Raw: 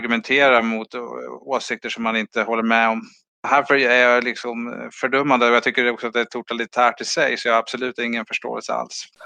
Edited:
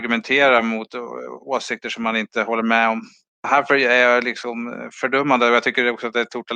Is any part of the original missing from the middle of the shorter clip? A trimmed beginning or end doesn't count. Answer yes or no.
no